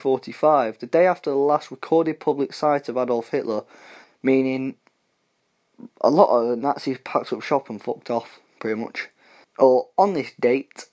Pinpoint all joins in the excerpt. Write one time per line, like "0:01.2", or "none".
0:04.0
0:09.4